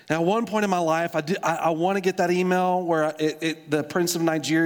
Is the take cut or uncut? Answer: uncut